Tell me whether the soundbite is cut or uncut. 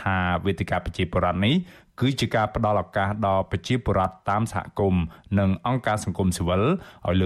uncut